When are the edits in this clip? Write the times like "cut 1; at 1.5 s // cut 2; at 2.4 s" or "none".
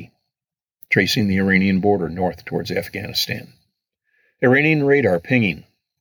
none